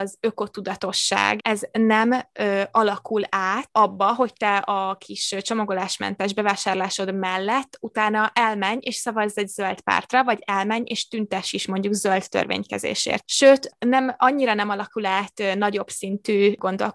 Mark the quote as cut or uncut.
cut